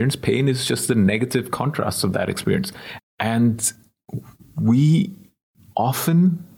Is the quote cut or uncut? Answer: cut